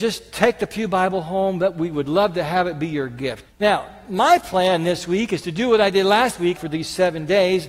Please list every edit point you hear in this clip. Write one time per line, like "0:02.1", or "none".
0:03.4
0:06.6